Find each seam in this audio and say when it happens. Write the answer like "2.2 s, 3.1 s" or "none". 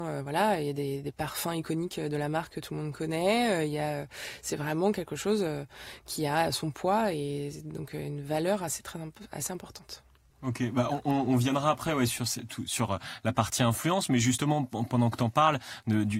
none